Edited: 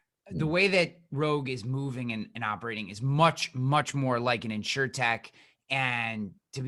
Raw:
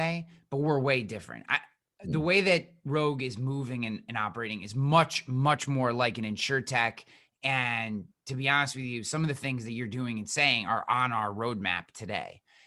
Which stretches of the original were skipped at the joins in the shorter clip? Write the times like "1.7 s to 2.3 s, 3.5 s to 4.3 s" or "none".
none

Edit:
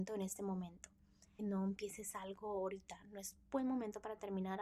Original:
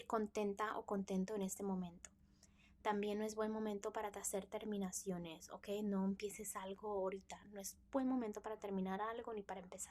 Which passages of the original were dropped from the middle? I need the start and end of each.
2.6 s to 5.8 s

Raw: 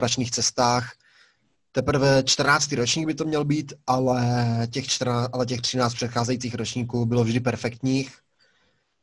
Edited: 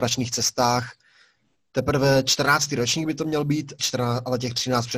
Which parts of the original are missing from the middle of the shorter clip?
3.8 s to 4.9 s

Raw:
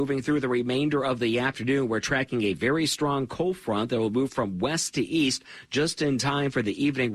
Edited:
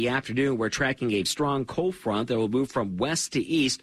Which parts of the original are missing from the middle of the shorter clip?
2.6 s to 2.9 s

